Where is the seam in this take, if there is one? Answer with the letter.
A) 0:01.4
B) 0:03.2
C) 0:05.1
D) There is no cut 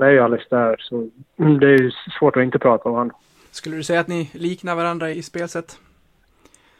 C